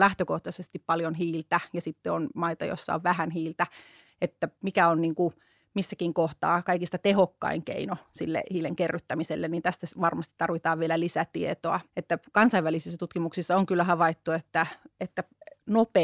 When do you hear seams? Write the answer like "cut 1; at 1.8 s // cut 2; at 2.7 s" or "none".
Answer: cut 1; at 11.9 s